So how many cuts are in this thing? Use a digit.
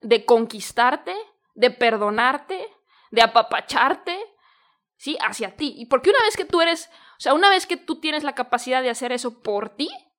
0